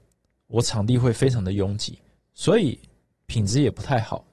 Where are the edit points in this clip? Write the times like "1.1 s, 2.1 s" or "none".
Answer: none